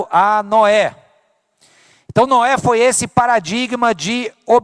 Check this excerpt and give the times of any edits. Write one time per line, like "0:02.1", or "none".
none